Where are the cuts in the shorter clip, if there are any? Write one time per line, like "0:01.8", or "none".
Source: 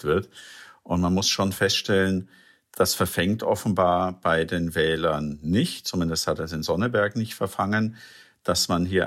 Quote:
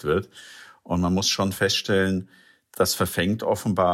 none